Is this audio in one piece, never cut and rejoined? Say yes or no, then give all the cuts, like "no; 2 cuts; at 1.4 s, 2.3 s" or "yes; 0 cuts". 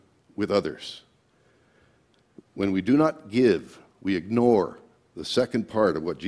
yes; 0 cuts